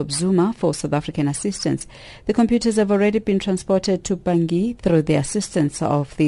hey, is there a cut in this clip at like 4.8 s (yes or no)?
yes